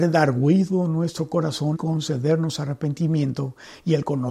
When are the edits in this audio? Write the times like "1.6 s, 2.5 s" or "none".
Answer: 1.7 s